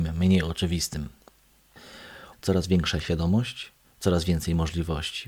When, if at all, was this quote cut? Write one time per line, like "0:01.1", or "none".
0:02.3
0:03.8